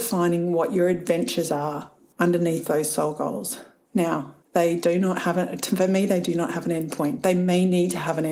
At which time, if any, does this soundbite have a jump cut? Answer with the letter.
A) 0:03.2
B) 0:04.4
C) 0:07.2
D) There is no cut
B